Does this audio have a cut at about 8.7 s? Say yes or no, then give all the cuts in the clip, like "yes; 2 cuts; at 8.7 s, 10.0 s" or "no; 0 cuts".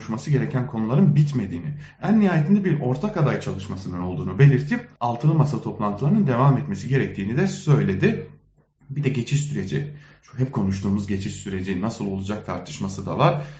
no; 1 cut; at 5.0 s